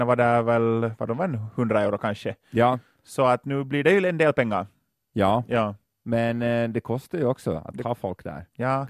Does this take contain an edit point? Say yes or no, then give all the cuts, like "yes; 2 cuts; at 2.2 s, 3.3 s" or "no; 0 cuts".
no; 0 cuts